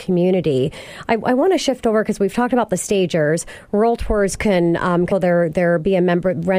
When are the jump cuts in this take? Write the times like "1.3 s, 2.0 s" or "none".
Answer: 5.1 s